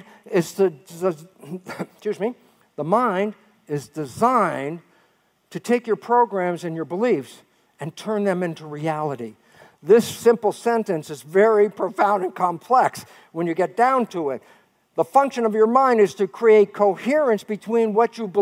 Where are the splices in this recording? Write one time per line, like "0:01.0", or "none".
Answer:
none